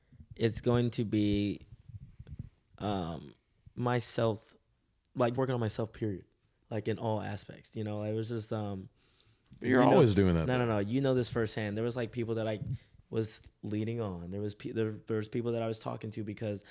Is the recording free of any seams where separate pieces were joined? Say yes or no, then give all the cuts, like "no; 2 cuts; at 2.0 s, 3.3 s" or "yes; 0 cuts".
no; 1 cut; at 5.3 s